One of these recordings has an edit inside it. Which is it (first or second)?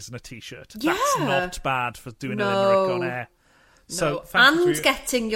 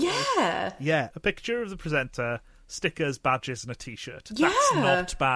second